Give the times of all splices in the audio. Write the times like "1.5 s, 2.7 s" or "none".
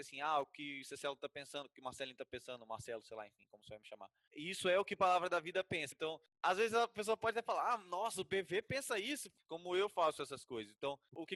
5.9 s, 9.5 s